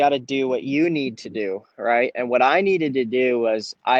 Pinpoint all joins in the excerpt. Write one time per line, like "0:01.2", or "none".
none